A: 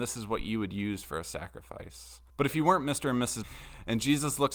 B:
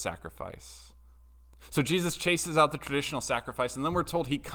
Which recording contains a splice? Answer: A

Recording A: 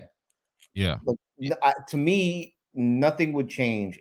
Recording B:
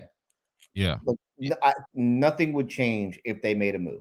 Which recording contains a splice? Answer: B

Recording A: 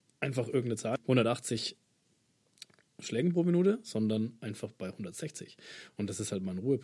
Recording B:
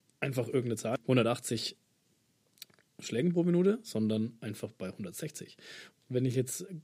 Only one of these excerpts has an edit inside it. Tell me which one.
B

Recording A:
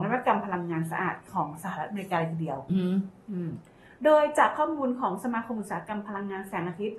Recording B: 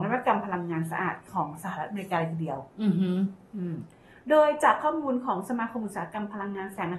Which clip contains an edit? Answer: A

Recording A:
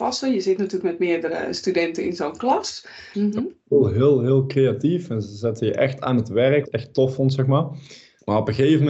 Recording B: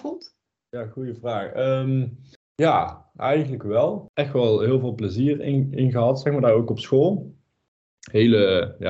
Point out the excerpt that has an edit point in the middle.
A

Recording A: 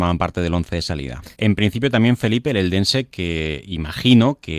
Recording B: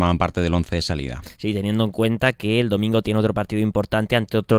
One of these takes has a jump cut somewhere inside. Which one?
A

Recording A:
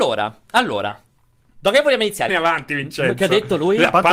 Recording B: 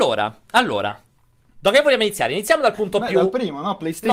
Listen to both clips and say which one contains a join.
A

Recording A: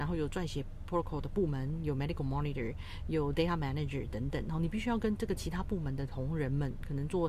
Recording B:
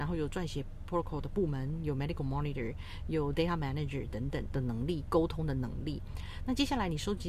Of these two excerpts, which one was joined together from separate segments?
B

